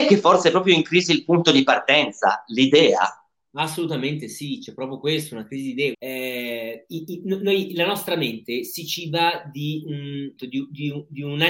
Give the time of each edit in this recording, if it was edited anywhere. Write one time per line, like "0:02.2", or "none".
0:05.9
0:10.4